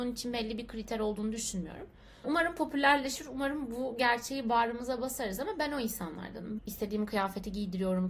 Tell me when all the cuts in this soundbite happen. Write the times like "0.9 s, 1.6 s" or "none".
2.2 s, 6.6 s